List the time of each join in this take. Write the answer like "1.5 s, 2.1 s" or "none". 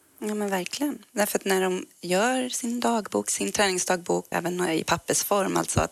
4.3 s